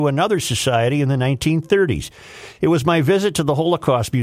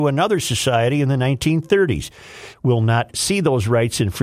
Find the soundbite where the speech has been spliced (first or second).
second